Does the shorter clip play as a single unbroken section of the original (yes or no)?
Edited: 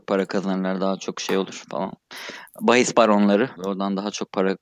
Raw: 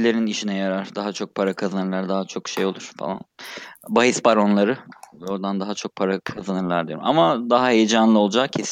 no